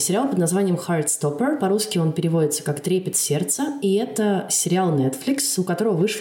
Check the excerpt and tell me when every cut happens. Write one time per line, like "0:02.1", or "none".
none